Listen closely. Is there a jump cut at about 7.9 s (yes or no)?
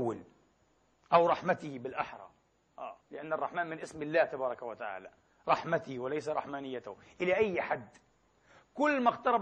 no